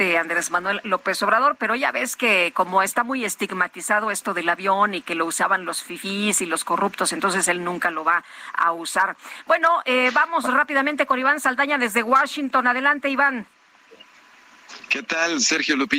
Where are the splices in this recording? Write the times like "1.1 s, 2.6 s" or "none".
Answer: none